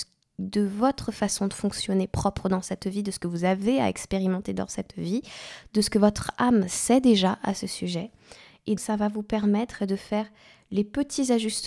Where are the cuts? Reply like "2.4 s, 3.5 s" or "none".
8.8 s

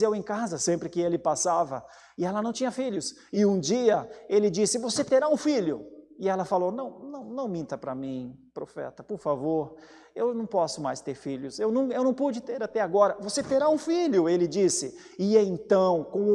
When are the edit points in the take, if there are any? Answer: none

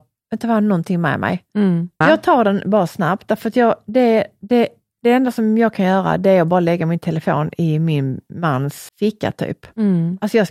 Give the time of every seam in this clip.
2.0 s, 8.9 s

